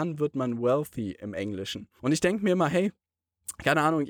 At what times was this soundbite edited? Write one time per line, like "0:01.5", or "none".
0:02.0